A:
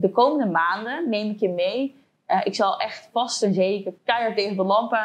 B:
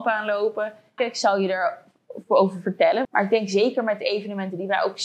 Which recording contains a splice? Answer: B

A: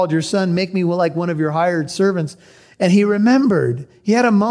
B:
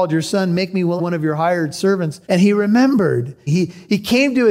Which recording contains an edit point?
B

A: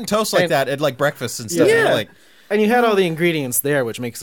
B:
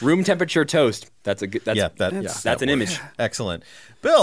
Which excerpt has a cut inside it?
B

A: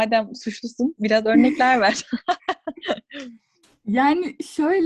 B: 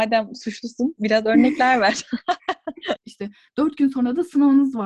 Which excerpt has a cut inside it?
B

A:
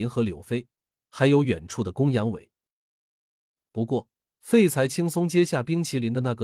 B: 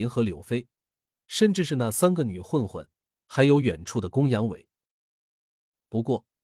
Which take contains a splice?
A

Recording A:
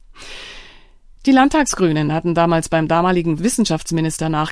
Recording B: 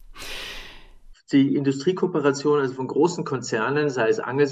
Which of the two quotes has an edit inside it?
B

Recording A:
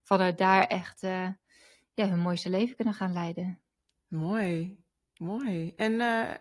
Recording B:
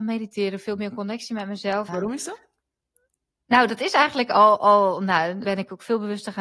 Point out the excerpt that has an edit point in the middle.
B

